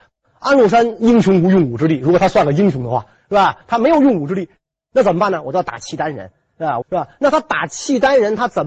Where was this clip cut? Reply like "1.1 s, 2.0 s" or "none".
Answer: 6.8 s